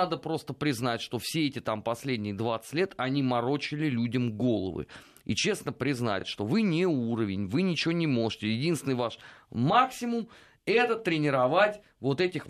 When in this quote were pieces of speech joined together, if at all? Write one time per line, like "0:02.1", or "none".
none